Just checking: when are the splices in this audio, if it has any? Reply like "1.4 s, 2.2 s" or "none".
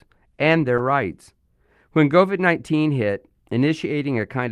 none